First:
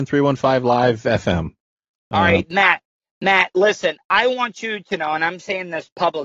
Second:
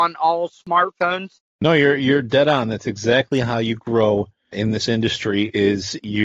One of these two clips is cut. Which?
second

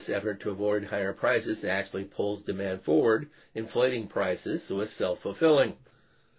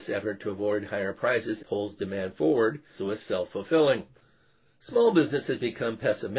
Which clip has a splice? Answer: second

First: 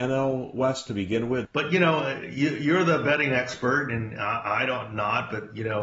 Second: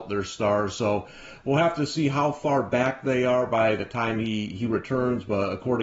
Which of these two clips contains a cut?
first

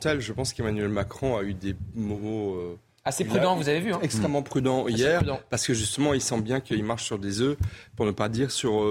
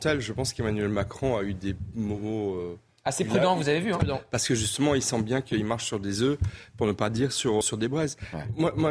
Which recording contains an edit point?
second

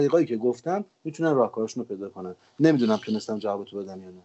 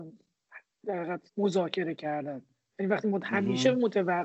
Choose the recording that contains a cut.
second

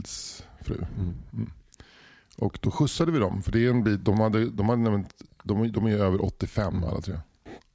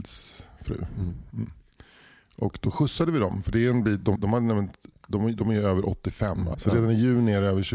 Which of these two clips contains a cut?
second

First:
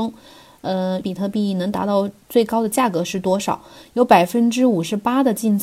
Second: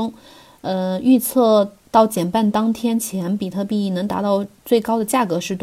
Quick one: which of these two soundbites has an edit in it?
first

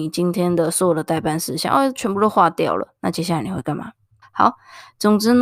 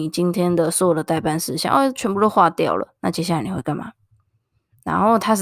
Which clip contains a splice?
first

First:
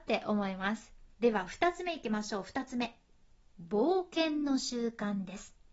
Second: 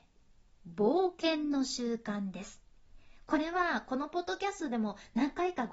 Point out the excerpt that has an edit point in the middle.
first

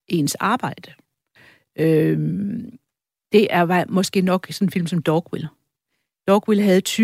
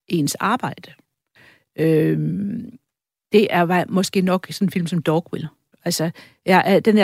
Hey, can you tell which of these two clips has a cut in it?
second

